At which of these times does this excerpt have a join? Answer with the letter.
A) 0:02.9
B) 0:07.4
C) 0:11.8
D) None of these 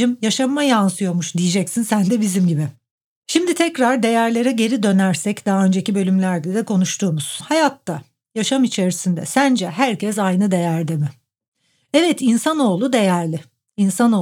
B